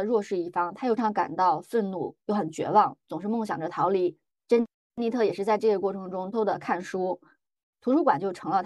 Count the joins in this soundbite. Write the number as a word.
three